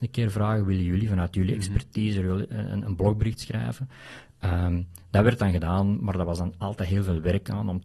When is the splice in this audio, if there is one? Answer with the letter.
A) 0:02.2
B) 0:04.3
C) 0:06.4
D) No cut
D